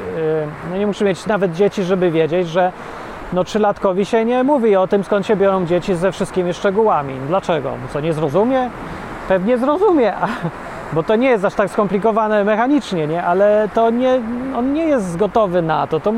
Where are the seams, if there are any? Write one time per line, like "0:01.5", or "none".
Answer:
none